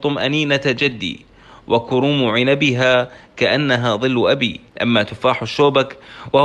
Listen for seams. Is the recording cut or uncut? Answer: cut